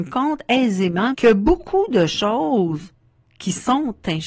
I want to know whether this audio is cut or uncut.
cut